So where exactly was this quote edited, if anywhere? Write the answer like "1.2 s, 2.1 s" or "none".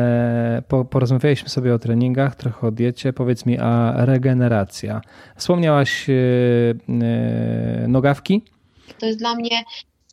9.0 s